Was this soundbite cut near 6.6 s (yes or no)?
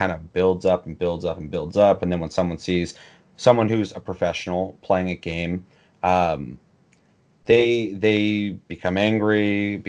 no